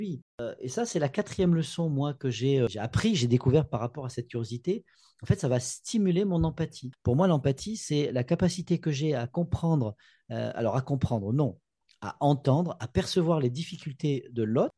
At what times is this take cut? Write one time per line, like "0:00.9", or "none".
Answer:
0:06.9